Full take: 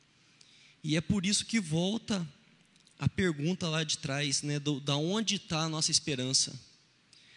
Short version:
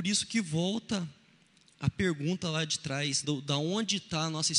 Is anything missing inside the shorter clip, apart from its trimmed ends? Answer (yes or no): yes